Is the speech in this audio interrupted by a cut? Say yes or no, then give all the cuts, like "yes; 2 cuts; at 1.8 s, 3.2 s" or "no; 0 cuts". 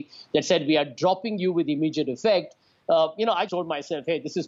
yes; 1 cut; at 3.5 s